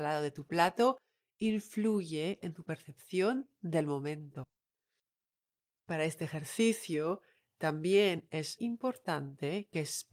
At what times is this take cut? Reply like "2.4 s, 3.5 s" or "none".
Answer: 8.6 s